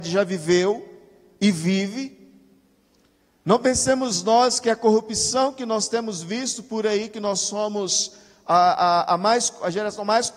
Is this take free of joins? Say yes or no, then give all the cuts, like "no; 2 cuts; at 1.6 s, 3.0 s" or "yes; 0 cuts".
yes; 0 cuts